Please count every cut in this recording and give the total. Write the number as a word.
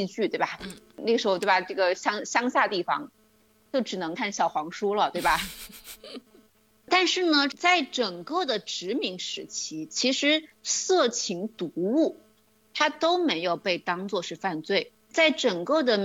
one